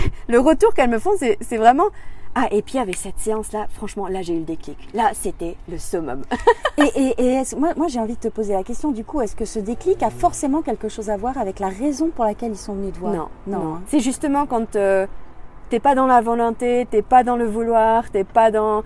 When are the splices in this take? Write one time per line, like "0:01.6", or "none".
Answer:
0:13.9